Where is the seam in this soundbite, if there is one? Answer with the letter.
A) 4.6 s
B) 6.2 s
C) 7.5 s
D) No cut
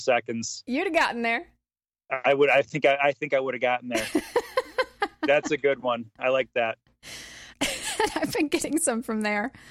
C